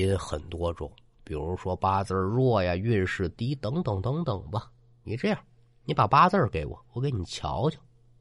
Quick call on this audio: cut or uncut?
uncut